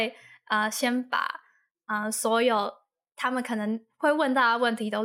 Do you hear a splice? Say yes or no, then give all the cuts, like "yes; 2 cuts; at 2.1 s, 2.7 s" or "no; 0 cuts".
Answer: no; 0 cuts